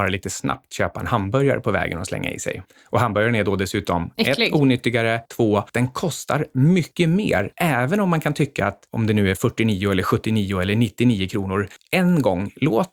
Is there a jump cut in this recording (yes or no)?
no